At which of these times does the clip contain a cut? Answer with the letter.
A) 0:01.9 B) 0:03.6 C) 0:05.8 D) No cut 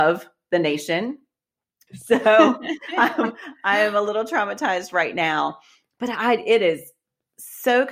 A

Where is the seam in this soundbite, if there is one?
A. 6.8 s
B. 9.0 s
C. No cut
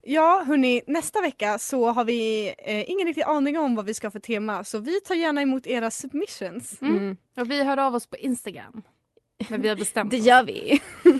C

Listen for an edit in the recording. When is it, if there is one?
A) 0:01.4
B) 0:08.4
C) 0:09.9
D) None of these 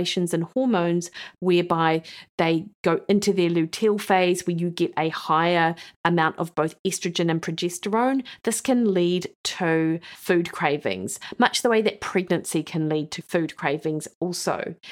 A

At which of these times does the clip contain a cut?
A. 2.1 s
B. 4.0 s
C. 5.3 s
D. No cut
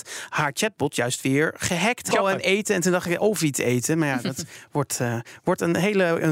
A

